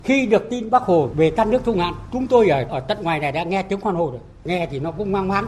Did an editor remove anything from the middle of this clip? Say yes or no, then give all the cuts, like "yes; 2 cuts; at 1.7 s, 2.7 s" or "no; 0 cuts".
no; 0 cuts